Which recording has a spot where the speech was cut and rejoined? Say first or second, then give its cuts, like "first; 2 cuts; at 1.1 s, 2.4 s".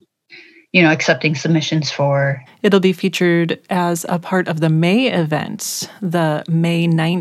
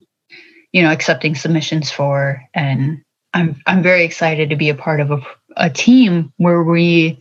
first; 1 cut; at 2.5 s